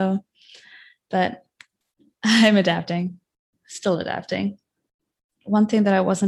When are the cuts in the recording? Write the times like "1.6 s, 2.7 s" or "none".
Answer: none